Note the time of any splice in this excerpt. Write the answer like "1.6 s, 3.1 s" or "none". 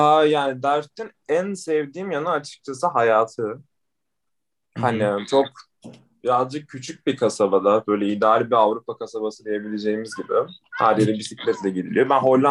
none